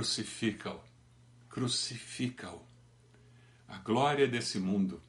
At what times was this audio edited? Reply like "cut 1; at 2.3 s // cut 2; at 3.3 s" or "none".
none